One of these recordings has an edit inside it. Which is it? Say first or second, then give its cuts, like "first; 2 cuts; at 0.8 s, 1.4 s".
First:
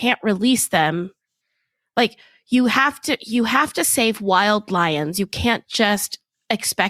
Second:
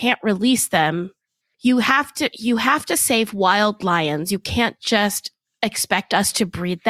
second; 1 cut; at 1.5 s